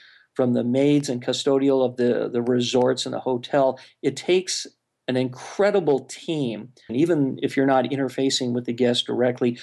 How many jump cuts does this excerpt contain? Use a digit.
1